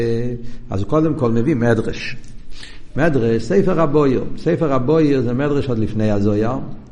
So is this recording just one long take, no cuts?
yes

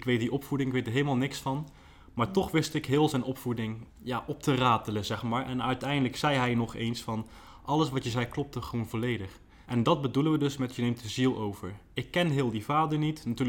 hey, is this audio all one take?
no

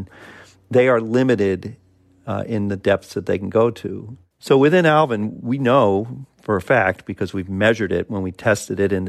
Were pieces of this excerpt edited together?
yes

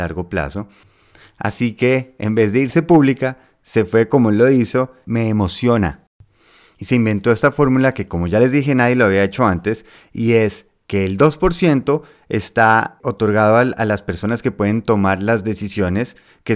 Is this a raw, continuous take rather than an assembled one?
no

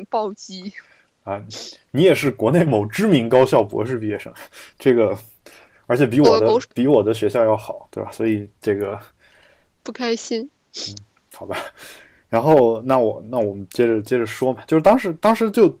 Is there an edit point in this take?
yes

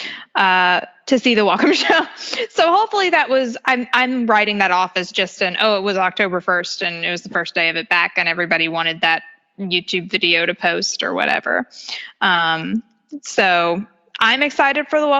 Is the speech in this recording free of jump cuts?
yes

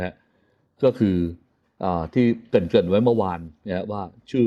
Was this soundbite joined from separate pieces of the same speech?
no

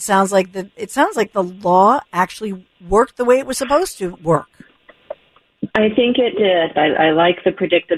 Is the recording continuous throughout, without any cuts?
no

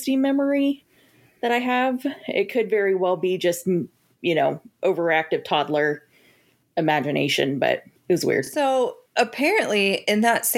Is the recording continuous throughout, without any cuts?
yes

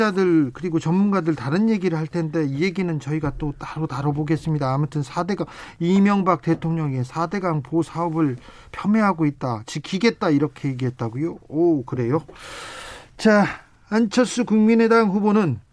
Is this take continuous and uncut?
yes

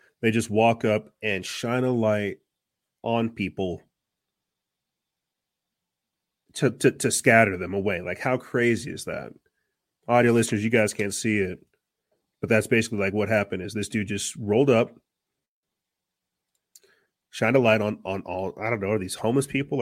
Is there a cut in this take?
no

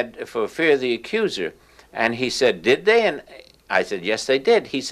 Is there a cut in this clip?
no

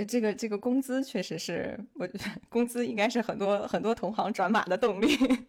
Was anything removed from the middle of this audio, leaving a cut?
no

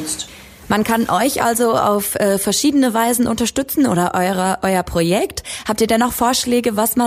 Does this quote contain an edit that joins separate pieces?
no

